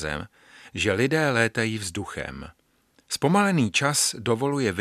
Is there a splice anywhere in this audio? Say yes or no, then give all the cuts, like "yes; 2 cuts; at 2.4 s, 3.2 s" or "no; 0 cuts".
no; 0 cuts